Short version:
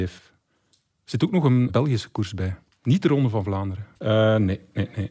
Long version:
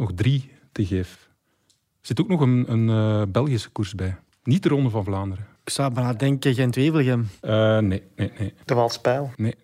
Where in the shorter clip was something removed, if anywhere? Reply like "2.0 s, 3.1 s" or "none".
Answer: 1.7 s, 4.0 s